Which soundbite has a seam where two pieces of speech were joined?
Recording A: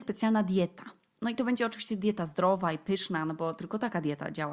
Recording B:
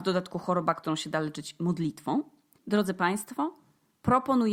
B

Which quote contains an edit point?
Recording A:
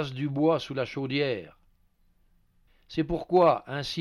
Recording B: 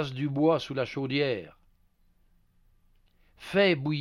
A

